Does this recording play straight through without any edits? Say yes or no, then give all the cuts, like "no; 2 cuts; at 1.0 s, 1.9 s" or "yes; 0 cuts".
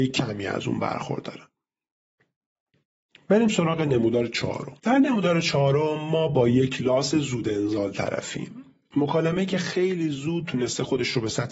no; 1 cut; at 4.8 s